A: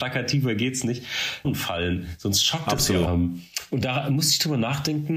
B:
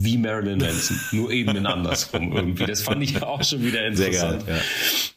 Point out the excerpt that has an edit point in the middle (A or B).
A